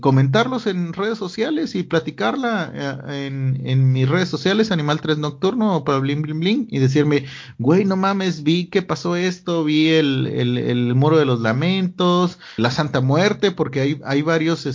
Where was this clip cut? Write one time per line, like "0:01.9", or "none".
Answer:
0:12.6